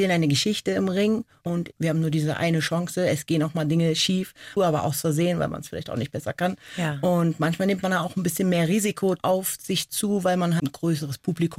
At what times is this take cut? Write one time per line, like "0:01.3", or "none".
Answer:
0:04.6
0:10.6